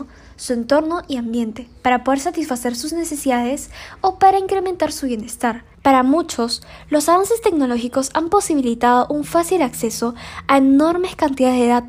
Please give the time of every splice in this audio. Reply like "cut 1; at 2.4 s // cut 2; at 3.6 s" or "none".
cut 1; at 5.7 s

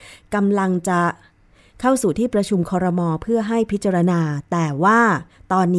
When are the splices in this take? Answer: none

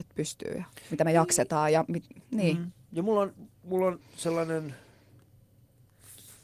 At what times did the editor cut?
none

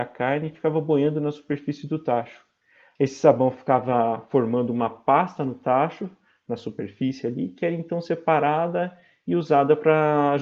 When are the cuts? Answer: cut 1; at 3.0 s

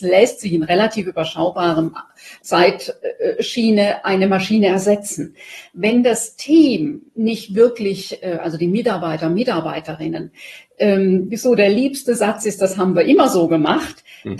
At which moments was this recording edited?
cut 1; at 2.4 s

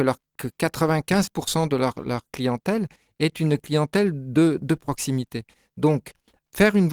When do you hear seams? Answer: none

